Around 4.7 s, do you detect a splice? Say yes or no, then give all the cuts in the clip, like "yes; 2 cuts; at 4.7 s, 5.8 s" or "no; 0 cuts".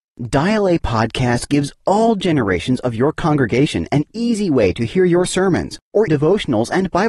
no; 1 cut; at 6.1 s